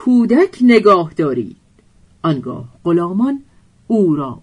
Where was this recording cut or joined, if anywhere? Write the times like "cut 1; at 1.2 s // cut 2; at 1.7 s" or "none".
none